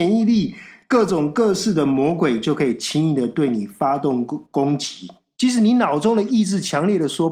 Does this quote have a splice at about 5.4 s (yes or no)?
yes